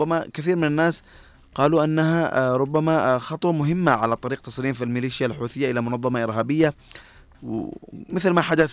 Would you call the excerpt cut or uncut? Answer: uncut